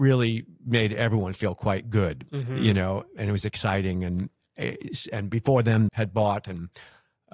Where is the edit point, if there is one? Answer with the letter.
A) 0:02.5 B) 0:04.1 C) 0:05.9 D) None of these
C